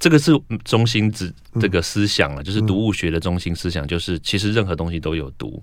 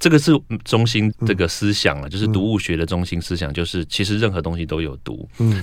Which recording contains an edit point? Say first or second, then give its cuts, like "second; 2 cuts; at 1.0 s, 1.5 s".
second; 1 cut; at 1.1 s